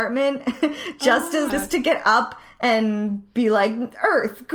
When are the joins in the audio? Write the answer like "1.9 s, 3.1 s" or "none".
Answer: 1.5 s